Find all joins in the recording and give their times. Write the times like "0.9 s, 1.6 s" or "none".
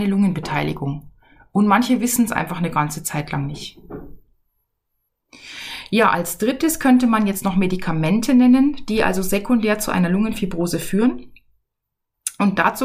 none